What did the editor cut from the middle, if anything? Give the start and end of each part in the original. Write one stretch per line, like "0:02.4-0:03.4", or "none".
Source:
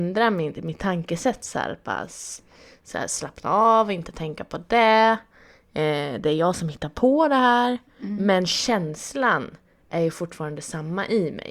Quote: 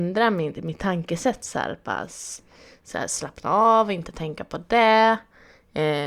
none